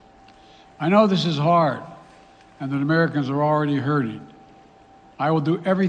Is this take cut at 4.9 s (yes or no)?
no